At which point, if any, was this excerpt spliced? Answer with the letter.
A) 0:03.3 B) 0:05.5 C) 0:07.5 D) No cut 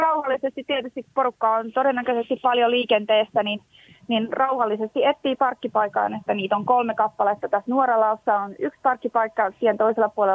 D